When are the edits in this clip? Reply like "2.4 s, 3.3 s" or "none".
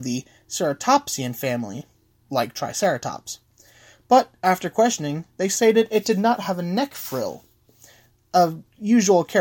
none